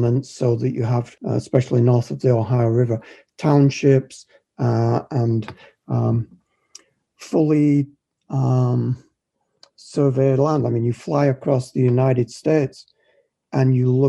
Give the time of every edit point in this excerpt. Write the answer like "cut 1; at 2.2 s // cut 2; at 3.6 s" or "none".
cut 1; at 1.2 s